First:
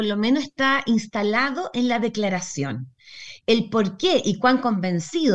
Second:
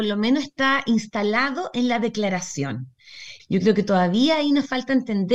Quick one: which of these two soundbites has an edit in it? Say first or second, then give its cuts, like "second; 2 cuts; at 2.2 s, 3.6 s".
second; 1 cut; at 3.4 s